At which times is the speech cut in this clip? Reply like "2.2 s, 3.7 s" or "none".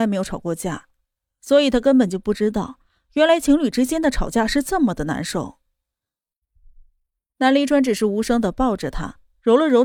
none